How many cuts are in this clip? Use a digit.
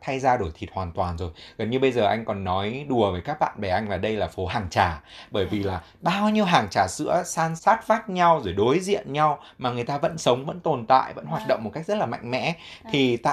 1